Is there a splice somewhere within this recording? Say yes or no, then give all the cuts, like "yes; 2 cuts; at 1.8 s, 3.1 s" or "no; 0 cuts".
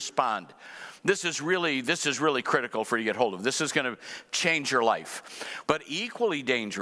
yes; 1 cut; at 5.6 s